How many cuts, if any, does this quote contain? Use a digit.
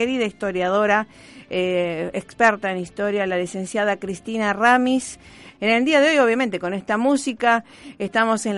1